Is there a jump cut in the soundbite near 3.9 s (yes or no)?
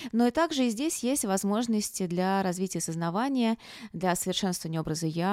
no